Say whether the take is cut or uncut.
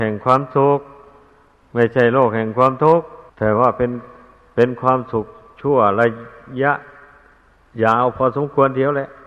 cut